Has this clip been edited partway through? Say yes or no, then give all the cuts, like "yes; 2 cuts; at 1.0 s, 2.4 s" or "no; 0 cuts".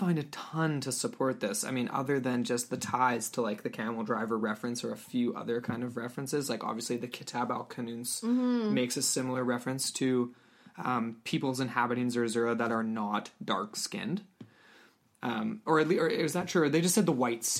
no; 0 cuts